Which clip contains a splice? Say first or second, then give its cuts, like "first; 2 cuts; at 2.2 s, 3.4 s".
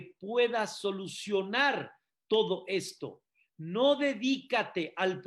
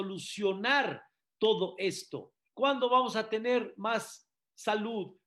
second; 1 cut; at 2.5 s